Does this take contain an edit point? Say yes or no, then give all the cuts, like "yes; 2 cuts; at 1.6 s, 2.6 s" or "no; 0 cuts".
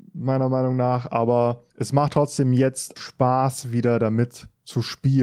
yes; 2 cuts; at 1.7 s, 3.0 s